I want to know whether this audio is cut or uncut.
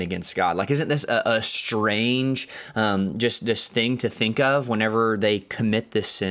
uncut